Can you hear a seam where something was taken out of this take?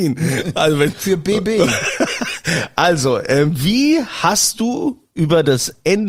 yes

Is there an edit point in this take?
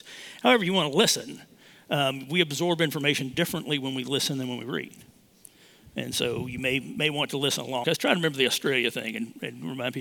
yes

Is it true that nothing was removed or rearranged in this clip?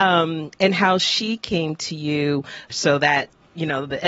no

